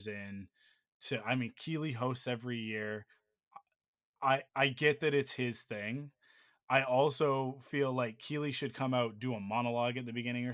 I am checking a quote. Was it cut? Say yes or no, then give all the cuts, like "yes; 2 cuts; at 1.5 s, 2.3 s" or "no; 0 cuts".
yes; 1 cut; at 4.5 s